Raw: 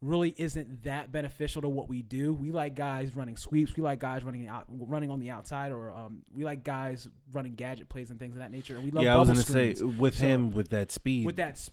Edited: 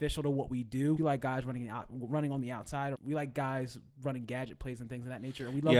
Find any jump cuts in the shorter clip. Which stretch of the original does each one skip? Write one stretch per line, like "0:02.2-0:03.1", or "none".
0:02.3-0:03.7
0:05.7-0:06.2